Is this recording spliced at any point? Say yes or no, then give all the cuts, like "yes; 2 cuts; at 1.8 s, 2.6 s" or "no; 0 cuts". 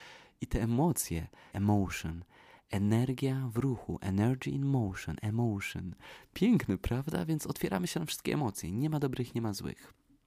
yes; 1 cut; at 1.5 s